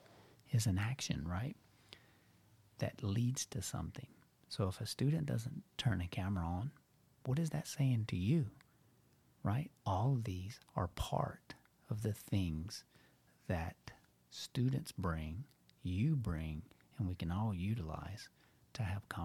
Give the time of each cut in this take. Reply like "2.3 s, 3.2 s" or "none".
9.7 s

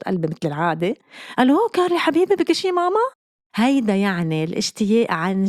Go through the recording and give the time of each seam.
3.4 s

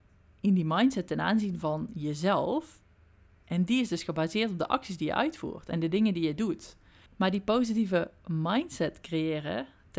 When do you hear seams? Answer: none

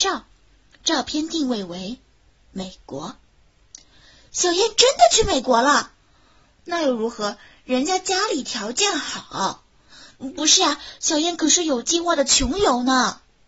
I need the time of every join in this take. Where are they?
none

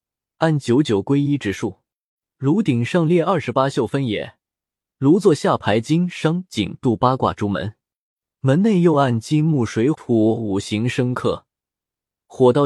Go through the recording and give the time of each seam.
9.9 s

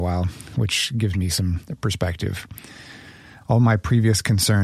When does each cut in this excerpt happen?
3.4 s

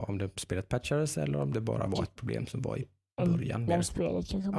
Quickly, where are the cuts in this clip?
1.5 s, 3.7 s

